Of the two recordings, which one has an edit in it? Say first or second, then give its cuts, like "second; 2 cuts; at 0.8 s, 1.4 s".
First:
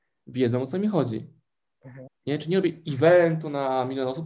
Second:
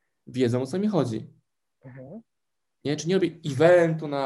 first; 1 cut; at 2.1 s